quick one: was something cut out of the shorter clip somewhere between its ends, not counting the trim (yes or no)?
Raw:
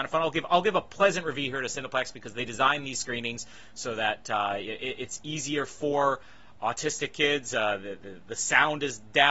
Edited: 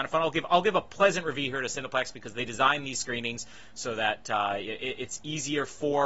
no